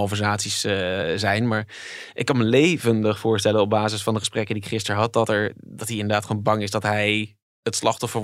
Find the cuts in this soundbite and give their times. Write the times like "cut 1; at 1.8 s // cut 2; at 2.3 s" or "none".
none

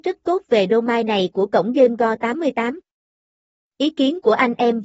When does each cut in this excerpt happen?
none

